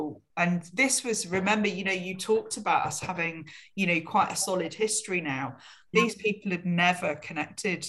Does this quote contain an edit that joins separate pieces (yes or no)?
yes